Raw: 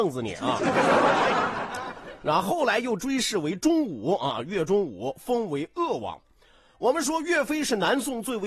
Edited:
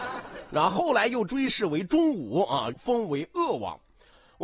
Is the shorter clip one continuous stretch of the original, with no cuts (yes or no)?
no